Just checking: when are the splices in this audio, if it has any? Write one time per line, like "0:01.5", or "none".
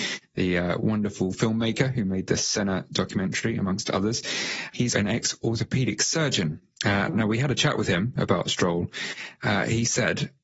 0:04.9